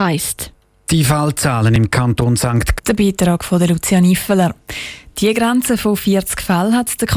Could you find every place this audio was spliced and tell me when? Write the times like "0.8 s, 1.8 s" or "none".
2.8 s

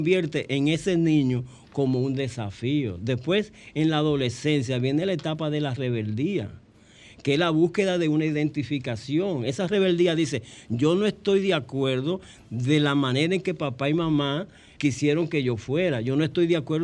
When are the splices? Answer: 14.8 s

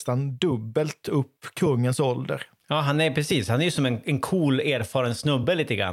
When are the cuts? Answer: none

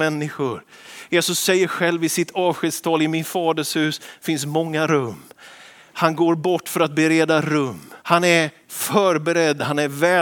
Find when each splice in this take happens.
8.0 s

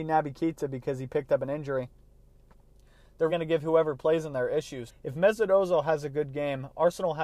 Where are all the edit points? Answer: 3.3 s, 4.9 s

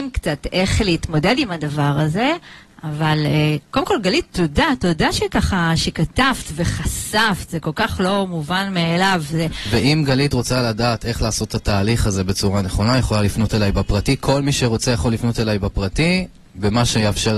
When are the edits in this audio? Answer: none

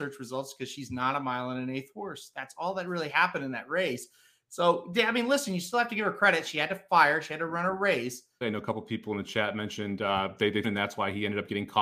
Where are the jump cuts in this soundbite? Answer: 8.4 s, 10.6 s

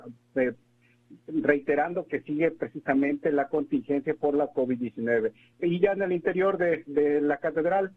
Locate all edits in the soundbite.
5.5 s

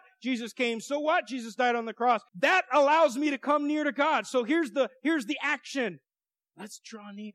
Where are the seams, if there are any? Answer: 2.3 s

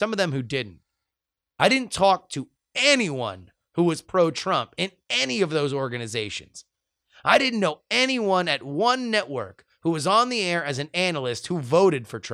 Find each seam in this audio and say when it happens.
none

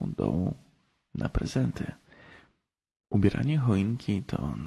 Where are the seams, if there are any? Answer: 3.0 s

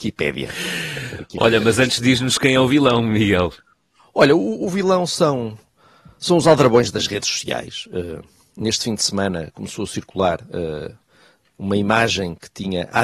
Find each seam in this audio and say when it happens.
none

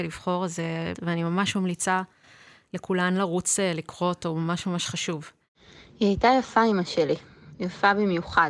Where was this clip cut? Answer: 0.9 s

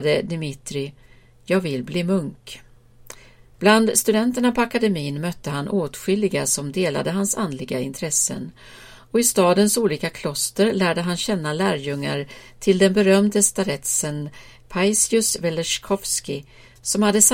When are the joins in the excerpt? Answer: 3.5 s

